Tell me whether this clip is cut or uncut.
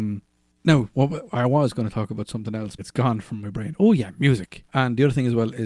cut